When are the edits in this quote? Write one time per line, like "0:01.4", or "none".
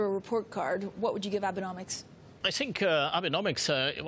0:02.4